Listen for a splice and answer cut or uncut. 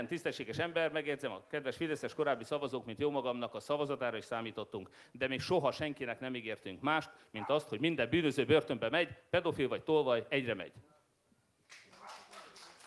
uncut